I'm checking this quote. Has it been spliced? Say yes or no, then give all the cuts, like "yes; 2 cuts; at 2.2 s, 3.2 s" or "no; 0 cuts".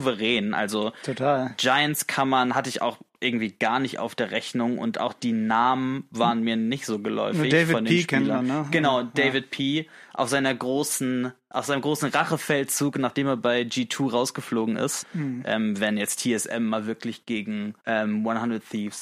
yes; 2 cuts; at 15.0 s, 17.8 s